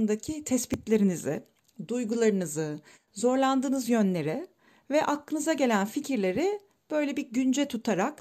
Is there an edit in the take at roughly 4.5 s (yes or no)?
no